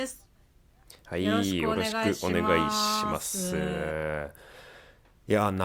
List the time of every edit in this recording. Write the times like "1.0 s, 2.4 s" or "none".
none